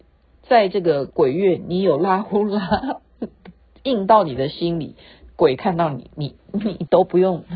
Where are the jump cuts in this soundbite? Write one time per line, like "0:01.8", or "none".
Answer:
none